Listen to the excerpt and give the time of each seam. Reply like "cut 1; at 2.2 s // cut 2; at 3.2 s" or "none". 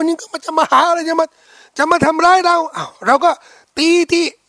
none